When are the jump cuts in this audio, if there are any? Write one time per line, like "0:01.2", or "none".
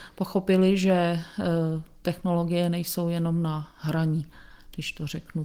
none